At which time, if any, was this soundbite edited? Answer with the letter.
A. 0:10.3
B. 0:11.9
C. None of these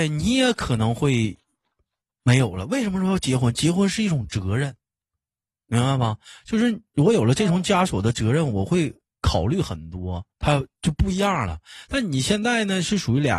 A